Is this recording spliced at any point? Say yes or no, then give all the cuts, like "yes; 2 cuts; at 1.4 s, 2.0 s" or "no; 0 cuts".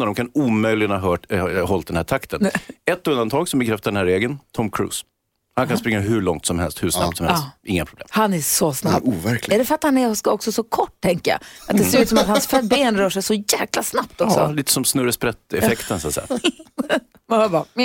no; 0 cuts